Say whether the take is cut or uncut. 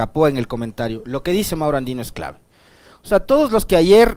uncut